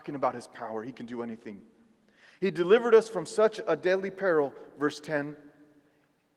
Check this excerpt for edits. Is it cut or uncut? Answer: uncut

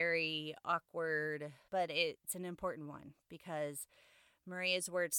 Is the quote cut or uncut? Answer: cut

